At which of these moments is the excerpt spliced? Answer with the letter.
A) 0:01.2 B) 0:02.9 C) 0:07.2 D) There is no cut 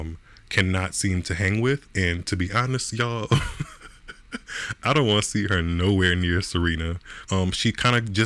C